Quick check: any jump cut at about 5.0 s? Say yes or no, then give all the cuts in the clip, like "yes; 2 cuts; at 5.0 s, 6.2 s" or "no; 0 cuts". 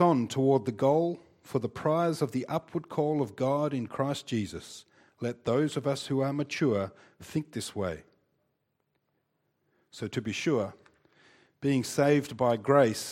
no; 0 cuts